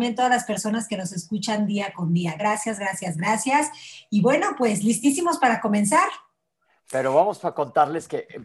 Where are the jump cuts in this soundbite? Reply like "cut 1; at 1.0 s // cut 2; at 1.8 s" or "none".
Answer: none